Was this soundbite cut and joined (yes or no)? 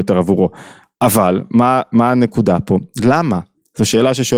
no